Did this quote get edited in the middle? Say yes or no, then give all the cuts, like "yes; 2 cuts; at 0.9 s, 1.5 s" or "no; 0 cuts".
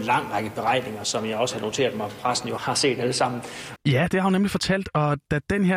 yes; 2 cuts; at 2.6 s, 3.8 s